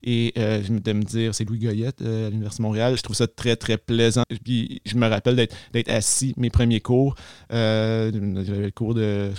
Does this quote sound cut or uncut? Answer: cut